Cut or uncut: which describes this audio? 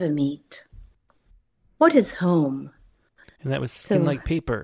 cut